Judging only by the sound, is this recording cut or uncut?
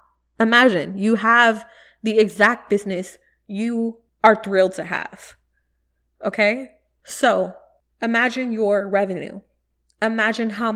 uncut